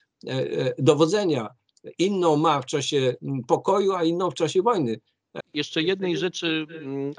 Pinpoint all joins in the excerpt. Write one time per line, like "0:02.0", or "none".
0:05.4